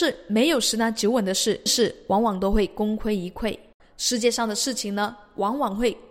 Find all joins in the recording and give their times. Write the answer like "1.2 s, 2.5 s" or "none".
1.7 s, 3.8 s